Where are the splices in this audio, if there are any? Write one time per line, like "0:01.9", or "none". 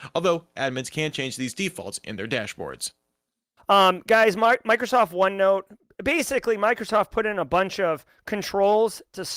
0:03.6